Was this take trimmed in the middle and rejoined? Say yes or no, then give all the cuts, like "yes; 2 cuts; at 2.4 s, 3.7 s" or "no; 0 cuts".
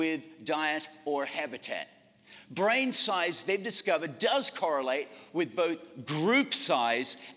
no; 0 cuts